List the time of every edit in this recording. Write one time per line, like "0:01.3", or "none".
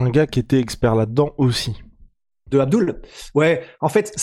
0:02.5